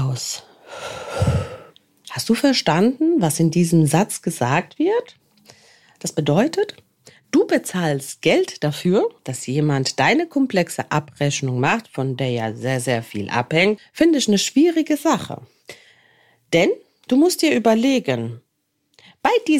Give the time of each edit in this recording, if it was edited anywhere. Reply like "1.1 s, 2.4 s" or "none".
9.2 s, 13.8 s